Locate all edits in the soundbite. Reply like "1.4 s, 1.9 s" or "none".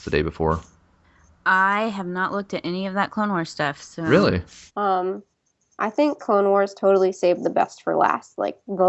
4.7 s